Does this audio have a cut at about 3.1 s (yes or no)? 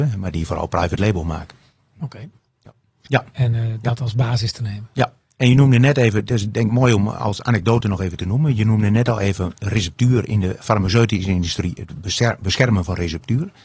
yes